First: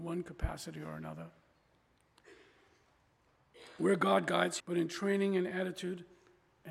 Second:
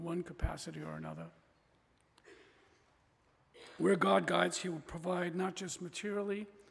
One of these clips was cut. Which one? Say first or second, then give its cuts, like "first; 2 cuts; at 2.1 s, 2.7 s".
first; 1 cut; at 4.6 s